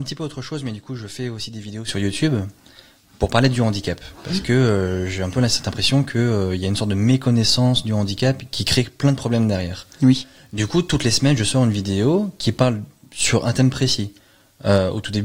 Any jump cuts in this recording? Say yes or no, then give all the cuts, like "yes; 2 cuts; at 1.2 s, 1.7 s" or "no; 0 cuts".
no; 0 cuts